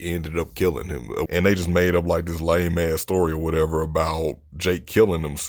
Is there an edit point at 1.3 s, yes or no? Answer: yes